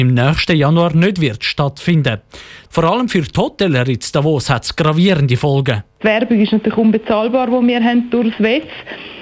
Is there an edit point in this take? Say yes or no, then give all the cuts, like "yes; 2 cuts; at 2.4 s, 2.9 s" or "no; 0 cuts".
yes; 2 cuts; at 2.7 s, 6.0 s